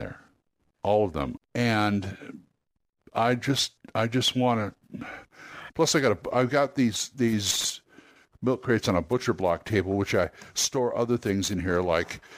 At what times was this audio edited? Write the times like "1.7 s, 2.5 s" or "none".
1.4 s, 5.7 s